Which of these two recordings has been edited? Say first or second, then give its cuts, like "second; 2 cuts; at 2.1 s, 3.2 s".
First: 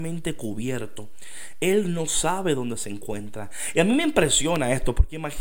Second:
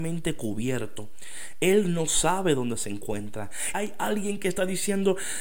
second; 1 cut; at 3.7 s